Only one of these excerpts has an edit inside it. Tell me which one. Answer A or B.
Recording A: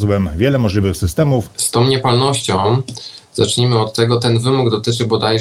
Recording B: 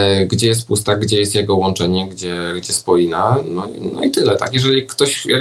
A